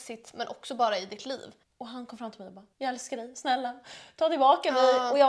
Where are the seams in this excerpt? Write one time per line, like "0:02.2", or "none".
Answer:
0:01.6
0:02.7